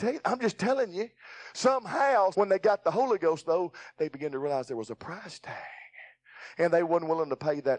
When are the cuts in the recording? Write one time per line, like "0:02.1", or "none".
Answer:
0:02.3